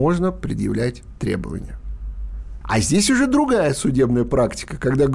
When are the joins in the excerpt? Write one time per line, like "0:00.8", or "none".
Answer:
0:02.6